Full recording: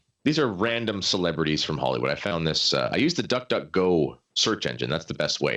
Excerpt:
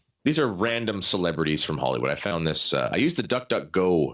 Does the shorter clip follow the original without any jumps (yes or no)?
yes